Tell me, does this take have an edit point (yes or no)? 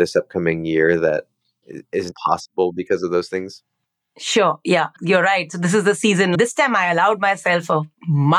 no